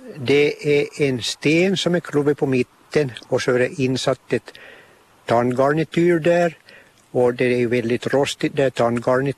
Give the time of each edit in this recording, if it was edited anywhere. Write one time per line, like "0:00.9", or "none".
none